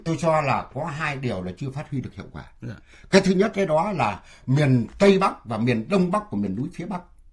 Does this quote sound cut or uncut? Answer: uncut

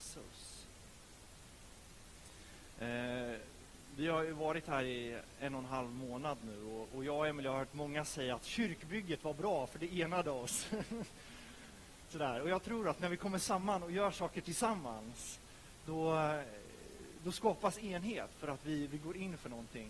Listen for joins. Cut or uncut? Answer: uncut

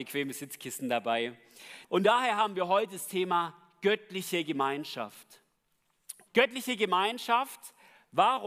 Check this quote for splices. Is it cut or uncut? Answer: cut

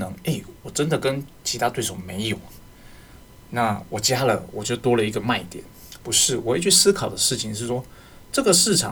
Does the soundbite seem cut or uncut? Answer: uncut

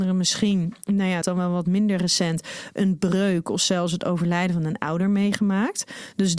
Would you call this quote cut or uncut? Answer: cut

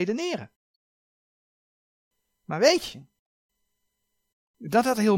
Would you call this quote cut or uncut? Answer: uncut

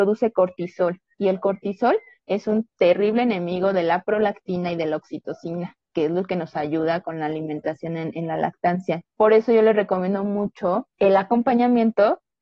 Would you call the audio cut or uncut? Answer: cut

